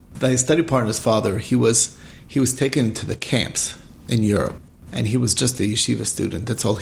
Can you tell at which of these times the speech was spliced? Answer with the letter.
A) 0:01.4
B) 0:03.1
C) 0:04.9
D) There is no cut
C